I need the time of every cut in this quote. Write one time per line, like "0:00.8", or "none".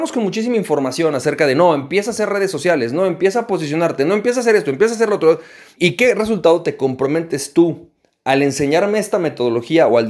0:05.8